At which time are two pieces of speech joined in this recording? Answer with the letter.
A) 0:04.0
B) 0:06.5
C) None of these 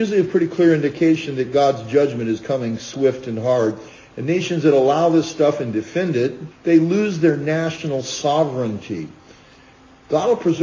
B